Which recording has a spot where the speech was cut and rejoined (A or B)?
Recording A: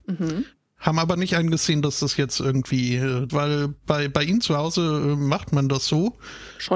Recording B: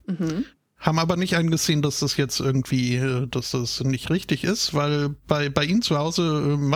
A